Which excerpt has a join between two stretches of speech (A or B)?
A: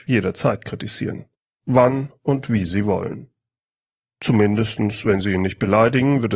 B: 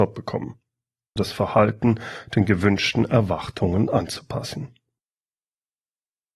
B